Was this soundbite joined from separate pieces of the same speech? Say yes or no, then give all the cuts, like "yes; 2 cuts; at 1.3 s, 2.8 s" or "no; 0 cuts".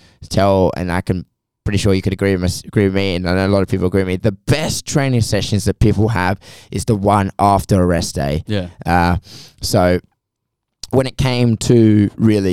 no; 0 cuts